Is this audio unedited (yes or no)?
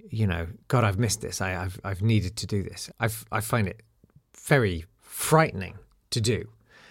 no